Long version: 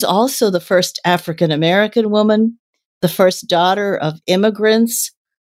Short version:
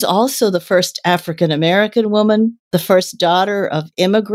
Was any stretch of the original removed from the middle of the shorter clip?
yes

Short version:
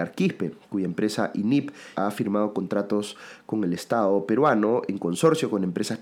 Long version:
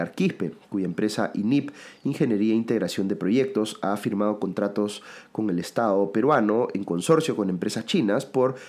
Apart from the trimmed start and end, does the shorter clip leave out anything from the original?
yes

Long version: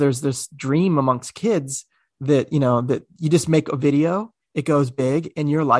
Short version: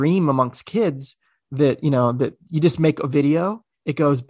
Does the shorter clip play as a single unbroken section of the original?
yes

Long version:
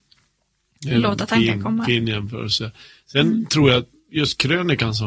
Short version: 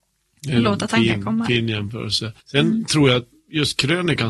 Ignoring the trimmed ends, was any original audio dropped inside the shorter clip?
yes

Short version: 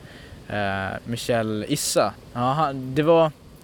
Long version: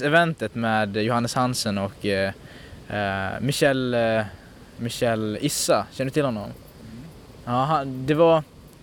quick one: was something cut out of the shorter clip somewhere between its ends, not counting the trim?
yes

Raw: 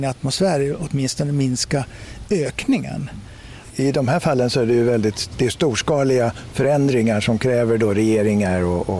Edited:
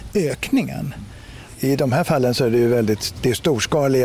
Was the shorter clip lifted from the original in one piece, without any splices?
yes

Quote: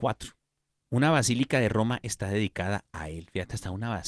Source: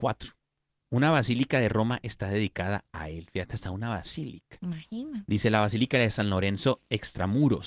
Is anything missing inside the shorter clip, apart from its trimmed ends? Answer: no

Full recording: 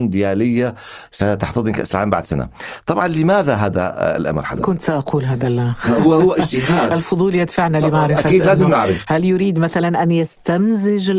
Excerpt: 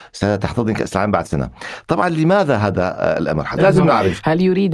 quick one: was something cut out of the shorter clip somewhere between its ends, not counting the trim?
yes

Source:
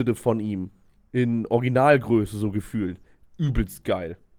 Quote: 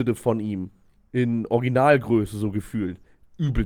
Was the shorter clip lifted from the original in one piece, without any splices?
yes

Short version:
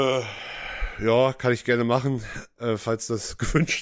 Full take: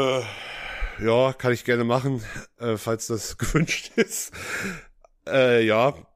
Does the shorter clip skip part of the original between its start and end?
no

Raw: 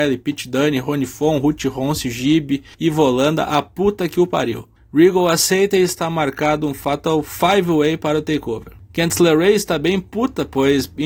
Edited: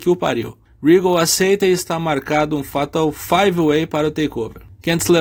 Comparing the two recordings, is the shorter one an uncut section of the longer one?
yes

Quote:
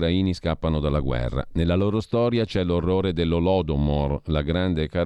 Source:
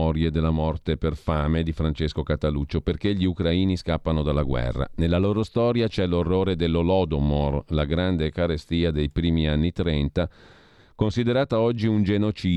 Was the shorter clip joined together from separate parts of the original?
no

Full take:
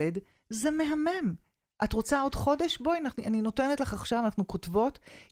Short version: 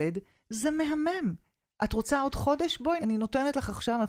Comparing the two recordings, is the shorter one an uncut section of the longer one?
no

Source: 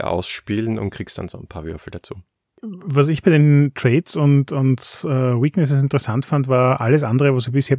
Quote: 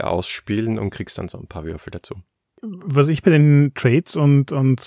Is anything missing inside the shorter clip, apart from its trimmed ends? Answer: no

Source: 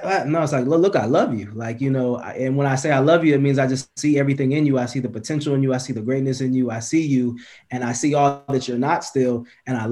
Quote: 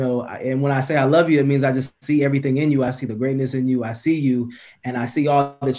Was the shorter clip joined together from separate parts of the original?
yes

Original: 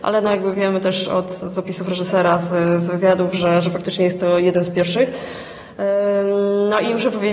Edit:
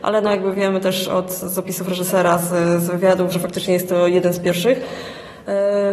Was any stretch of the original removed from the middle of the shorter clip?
yes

